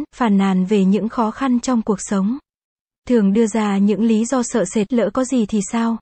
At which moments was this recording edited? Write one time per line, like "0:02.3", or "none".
0:02.9
0:04.9